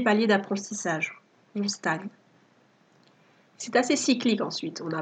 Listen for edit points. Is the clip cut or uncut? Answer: uncut